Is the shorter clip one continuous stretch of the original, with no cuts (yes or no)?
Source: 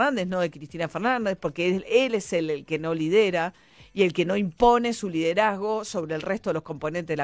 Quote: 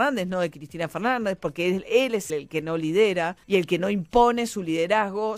no